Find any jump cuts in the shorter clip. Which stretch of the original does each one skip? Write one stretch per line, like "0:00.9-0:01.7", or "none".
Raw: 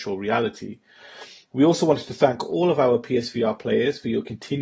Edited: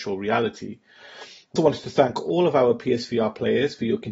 0:01.6-0:01.8